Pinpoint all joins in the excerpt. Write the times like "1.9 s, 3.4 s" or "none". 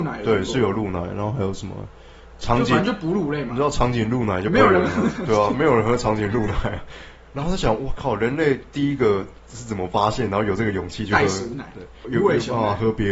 12.0 s